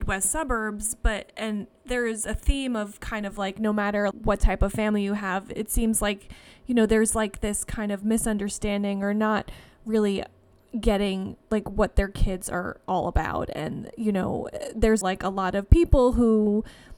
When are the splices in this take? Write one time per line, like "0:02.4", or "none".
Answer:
0:04.1
0:11.4
0:15.0